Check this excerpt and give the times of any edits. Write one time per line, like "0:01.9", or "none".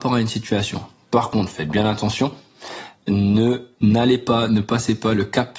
none